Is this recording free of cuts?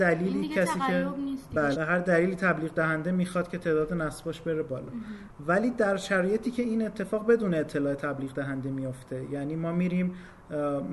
no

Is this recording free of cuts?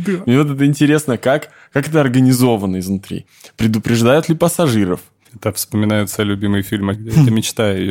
no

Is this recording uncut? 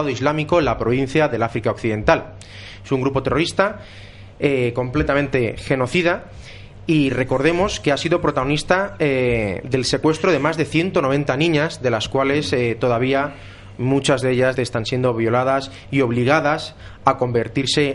no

